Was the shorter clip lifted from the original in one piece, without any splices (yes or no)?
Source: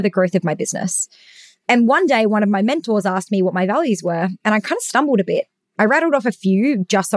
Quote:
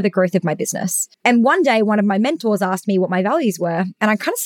no